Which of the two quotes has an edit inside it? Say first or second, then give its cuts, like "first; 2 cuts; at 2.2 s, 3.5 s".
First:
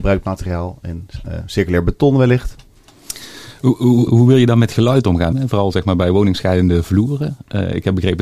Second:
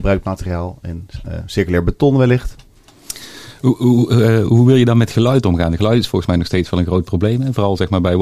first; 2 cuts; at 4.1 s, 5.3 s